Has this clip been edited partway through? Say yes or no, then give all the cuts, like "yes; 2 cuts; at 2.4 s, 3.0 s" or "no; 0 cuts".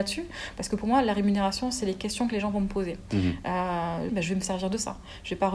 yes; 1 cut; at 4.1 s